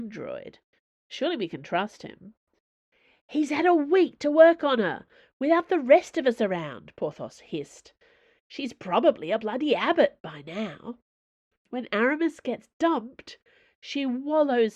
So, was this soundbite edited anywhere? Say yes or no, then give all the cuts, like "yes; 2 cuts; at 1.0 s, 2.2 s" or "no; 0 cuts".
yes; 1 cut; at 11.5 s